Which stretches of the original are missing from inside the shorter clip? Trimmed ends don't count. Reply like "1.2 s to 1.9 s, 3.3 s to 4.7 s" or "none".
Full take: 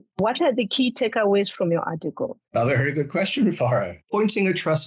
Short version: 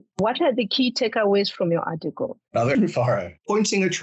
2.7 s to 3.4 s